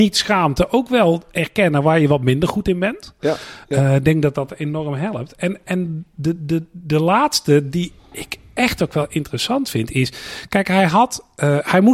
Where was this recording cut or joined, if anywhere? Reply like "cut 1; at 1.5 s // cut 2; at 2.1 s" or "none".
none